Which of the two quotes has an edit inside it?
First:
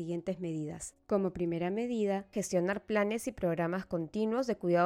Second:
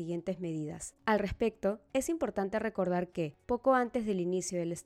second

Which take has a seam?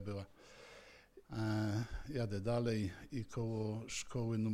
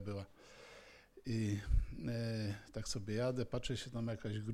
first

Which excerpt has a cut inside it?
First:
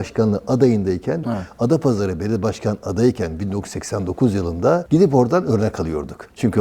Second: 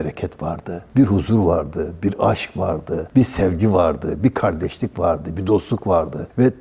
first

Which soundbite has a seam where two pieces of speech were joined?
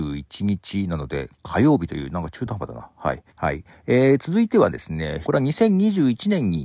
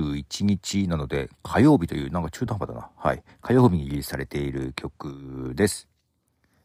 first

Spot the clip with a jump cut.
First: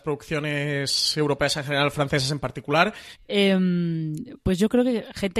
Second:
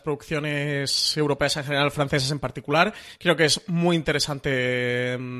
first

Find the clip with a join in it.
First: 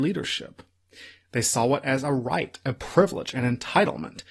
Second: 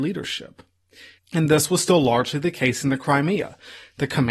second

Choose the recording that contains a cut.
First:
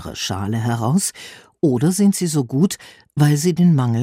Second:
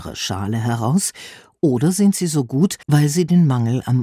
second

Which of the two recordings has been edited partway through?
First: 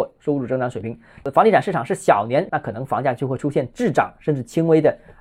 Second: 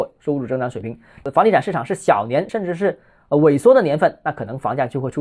first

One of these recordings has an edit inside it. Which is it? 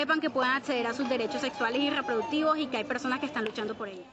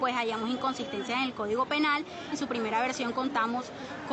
second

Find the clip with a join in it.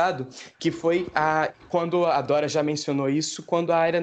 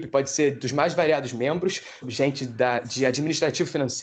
second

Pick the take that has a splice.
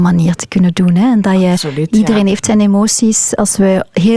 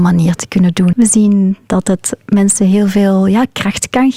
second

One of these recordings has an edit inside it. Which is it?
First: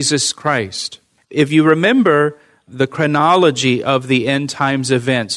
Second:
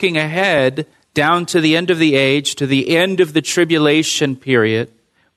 first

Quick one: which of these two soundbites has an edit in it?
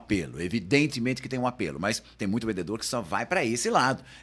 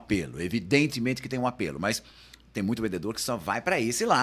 first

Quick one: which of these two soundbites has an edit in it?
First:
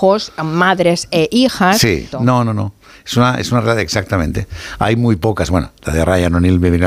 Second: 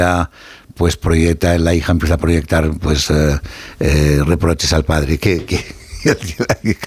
first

